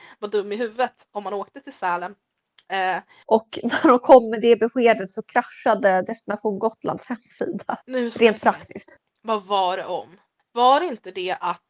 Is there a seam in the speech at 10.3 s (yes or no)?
no